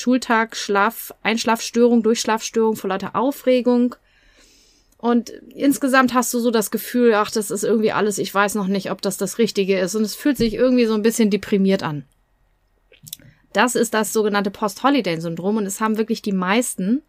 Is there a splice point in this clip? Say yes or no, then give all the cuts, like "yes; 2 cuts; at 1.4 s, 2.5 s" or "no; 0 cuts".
no; 0 cuts